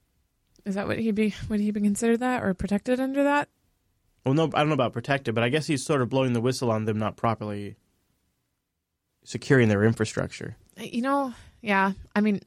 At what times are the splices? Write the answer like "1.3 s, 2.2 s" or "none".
none